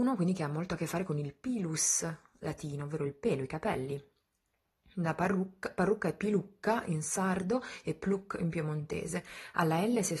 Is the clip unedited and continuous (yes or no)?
yes